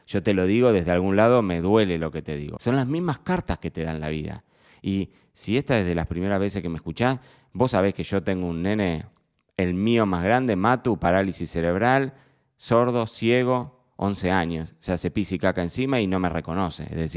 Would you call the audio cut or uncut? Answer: cut